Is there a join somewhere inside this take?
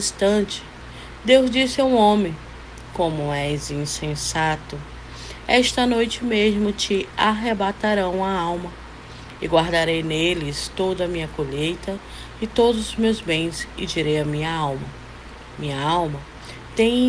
yes; 1 cut; at 9.4 s

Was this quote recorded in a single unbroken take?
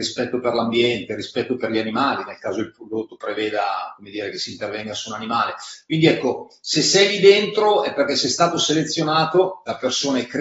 yes; 0 cuts

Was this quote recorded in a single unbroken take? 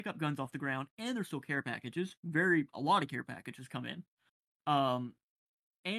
yes; 0 cuts

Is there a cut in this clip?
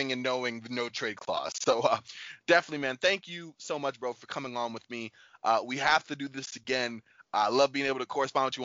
no; 0 cuts

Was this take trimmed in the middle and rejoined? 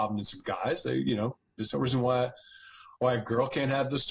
no; 0 cuts

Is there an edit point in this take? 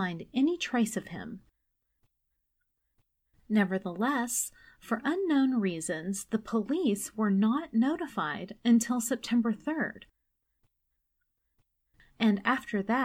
no; 0 cuts

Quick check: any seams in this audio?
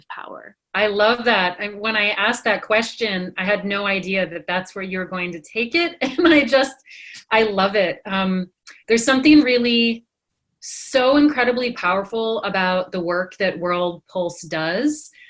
no; 0 cuts

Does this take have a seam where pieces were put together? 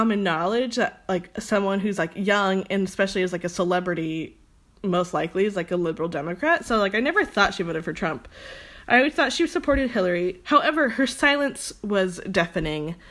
no; 0 cuts

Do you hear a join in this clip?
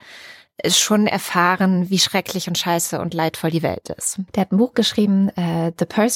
yes; 1 cut; at 4.3 s

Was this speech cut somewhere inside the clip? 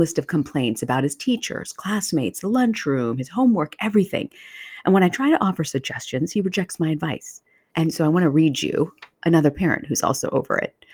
yes; 2 cuts; at 7.7 s, 9.1 s

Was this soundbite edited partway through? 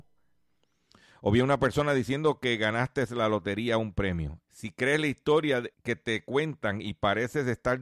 yes; 2 cuts; at 4.4 s, 5.7 s

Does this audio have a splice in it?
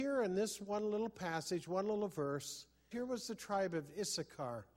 yes; 1 cut; at 2.9 s

